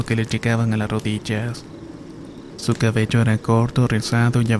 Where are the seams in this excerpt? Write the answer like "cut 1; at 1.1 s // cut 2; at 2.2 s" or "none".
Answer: none